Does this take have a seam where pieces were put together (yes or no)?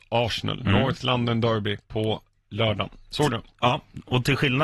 no